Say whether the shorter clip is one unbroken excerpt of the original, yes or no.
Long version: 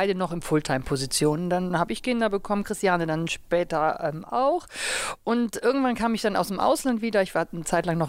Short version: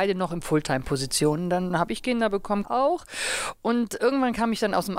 no